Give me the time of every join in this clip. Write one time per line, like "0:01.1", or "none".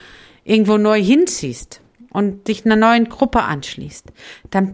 none